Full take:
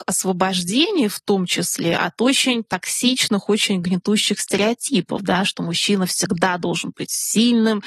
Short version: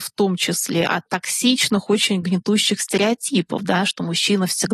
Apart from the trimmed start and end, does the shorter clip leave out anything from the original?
yes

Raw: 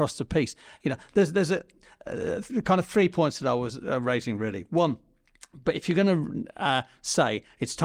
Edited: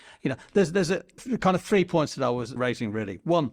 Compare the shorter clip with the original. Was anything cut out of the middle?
yes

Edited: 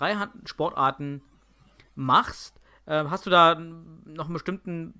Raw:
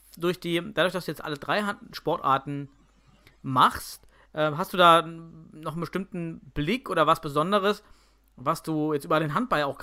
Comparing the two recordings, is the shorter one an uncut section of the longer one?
yes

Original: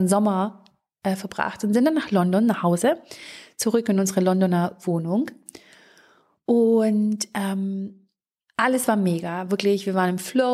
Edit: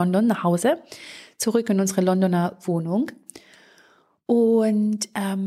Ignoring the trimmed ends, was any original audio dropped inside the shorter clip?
no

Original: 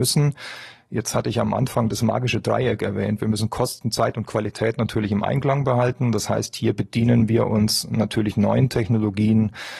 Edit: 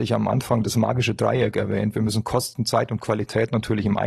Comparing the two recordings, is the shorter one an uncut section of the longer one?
yes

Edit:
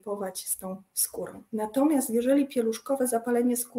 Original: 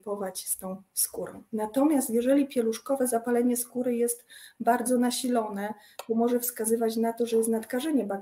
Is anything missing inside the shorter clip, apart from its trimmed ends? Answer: no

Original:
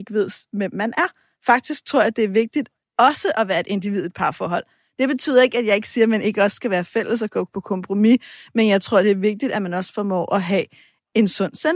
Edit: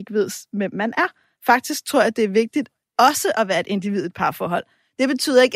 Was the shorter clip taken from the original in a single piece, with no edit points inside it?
yes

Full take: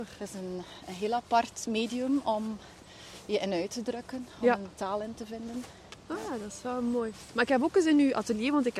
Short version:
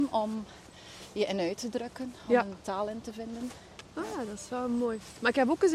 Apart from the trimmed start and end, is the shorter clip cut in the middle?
no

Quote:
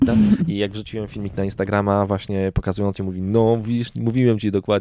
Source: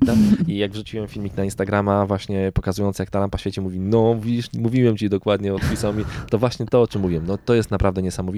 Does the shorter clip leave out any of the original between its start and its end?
yes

